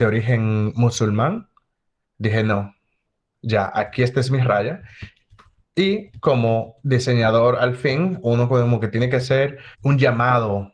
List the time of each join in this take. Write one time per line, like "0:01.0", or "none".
none